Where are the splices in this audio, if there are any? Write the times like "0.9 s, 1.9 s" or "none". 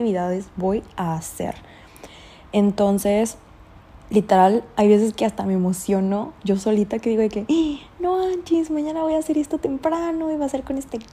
4.0 s